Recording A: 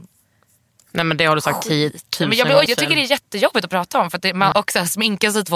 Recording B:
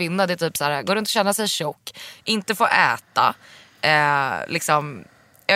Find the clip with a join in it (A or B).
A